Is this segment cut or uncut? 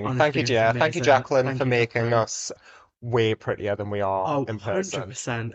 uncut